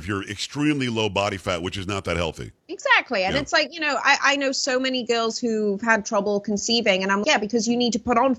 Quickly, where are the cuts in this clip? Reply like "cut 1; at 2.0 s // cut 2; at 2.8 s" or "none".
cut 1; at 2.6 s // cut 2; at 7.2 s